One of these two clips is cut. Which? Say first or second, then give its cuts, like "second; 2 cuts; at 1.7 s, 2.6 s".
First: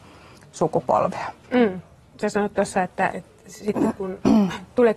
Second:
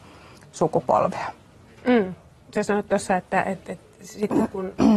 first; 2 cuts; at 1.4 s, 3.1 s